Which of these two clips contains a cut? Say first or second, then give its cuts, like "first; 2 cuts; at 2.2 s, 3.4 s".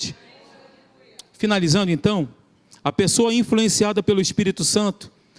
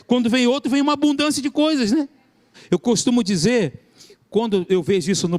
second; 1 cut; at 2.5 s